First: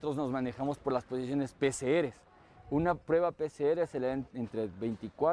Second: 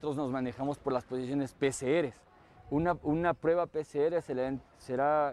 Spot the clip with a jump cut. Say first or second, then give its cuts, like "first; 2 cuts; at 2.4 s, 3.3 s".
first; 2 cuts; at 3.0 s, 4.3 s